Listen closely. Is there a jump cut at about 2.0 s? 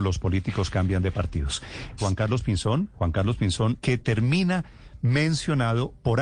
yes; 2 cuts; at 2.0 s, 3.8 s

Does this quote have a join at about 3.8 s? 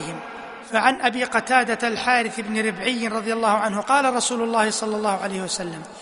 yes; 1 cut; at 3.8 s

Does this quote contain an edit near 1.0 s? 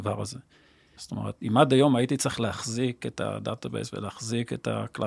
yes; 1 cut; at 1.0 s

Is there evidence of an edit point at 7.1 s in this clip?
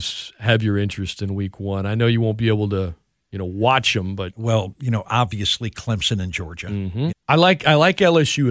yes; 1 cut; at 7.1 s

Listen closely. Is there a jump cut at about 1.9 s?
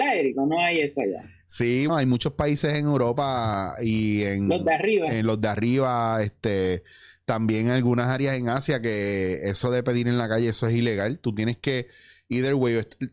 yes; 1 cut; at 1.9 s

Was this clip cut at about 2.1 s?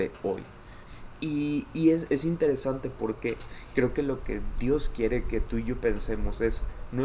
yes; 1 cut; at 2.1 s

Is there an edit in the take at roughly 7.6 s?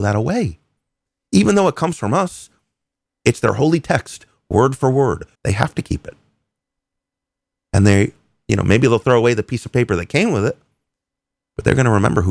no; 1 cut; at 5.3 s

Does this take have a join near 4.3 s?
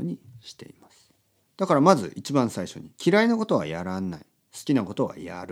no; 2 cuts; at 1.4 s, 2.9 s

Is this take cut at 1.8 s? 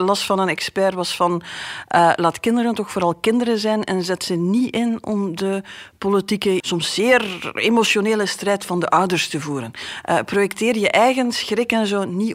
no; 1 cut; at 6.6 s

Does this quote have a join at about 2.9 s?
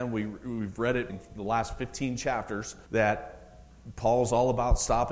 yes; 2 cuts; at 1.1 s, 2.9 s

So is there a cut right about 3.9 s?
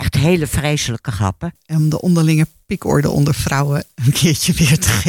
no; 1 cut; at 1.6 s

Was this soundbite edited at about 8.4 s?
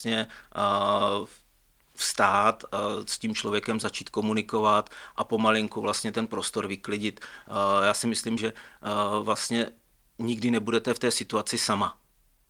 yes; 1 cut; at 8.4 s

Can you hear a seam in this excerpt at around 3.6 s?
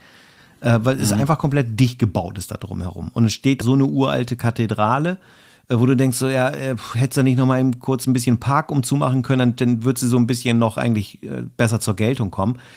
yes; 1 cut; at 3.6 s

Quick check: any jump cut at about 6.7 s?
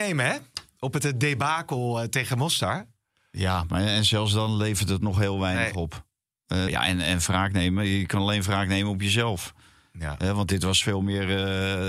yes; 1 cut; at 6.7 s

